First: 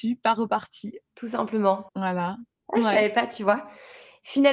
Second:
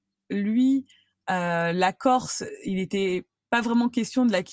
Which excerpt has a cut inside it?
first; 1 cut; at 1.9 s

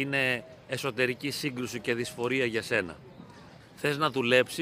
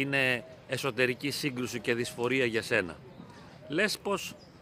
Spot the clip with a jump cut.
first; 1 cut; at 3.6 s

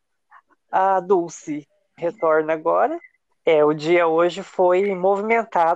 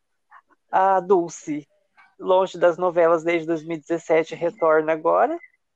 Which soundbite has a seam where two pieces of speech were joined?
first; 2 cuts; at 2.0 s, 3.3 s

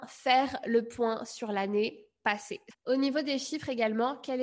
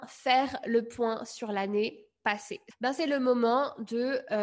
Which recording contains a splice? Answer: first; 1 cut; at 2.7 s

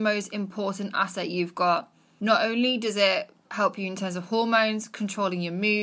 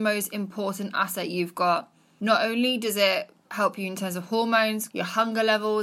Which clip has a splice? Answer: second; 1 cut; at 4.9 s

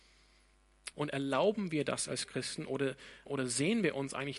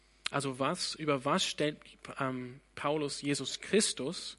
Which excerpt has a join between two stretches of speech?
first; 2 cuts; at 0.9 s, 3.3 s

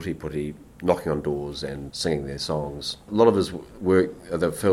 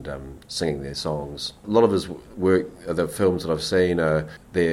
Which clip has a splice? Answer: first; 1 cut; at 1.9 s

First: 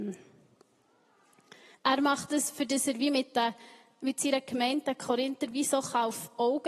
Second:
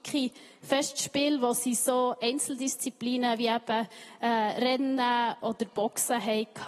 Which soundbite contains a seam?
first; 1 cut; at 1.7 s

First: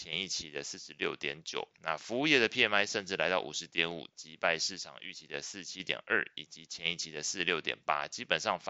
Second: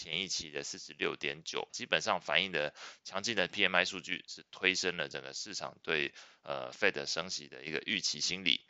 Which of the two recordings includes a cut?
second; 1 cut; at 1.7 s

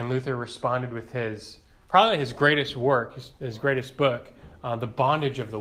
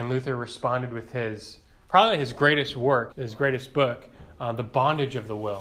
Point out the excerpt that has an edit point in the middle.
second; 1 cut; at 3.1 s

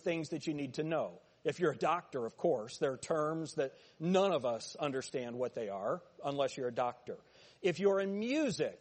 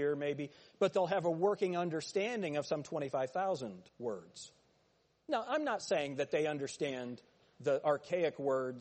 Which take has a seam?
second; 1 cut; at 3.9 s

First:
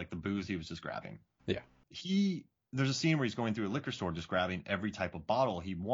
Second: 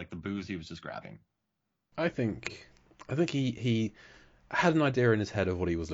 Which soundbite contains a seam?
first; 1 cut; at 1.4 s

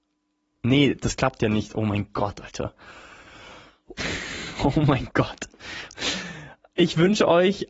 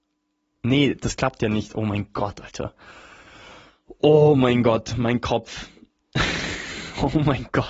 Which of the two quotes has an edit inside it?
first; 2 cuts; at 4.0 s, 5.9 s

